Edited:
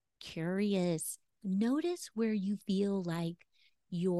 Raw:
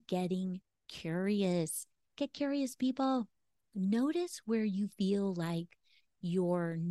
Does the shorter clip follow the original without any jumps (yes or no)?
no